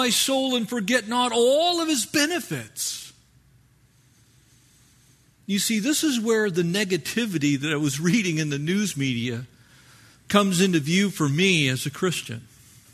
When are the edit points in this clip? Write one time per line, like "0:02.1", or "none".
none